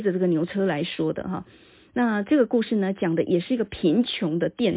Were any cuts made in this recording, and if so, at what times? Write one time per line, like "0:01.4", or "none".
none